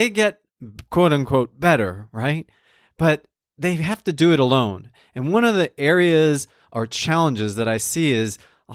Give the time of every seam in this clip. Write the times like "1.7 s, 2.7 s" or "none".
none